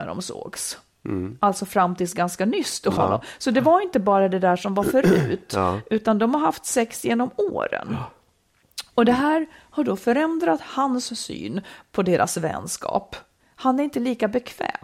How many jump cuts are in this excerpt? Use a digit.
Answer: 1